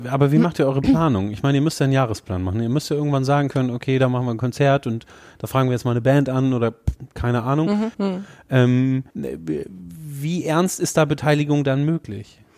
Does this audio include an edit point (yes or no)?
yes